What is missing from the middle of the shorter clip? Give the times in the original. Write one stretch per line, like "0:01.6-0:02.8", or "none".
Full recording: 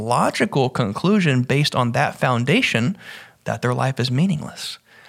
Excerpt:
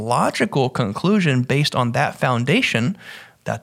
none